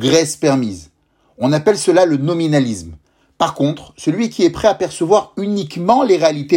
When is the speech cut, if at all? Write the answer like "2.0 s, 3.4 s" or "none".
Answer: none

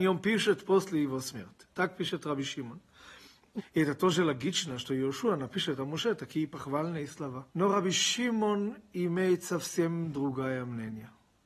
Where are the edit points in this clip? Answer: 3.6 s, 7.5 s

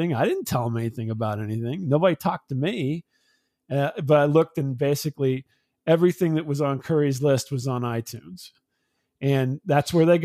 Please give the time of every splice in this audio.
none

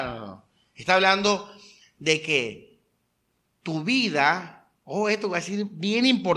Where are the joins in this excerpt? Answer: 4.8 s

